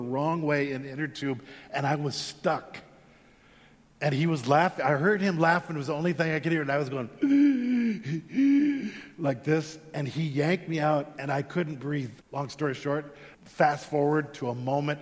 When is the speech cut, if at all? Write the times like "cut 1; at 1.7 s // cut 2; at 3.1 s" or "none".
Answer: cut 1; at 12.2 s // cut 2; at 13.3 s